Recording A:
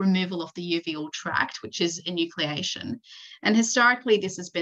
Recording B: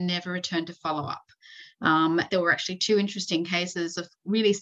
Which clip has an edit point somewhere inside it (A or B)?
B